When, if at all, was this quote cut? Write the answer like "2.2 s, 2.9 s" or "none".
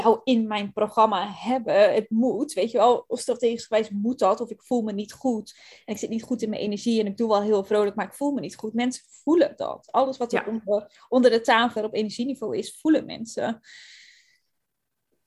11.8 s